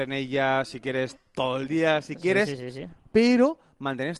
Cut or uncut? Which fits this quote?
uncut